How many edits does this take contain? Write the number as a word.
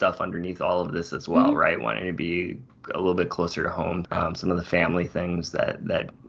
one